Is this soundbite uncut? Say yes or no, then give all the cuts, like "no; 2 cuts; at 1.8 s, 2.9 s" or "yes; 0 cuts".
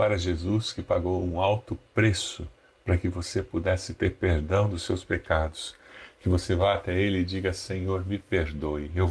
yes; 0 cuts